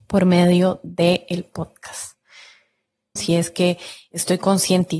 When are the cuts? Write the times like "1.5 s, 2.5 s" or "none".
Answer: 3.2 s